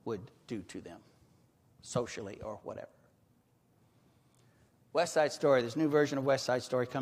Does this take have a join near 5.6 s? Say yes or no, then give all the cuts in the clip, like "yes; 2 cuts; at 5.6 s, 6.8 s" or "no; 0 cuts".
no; 0 cuts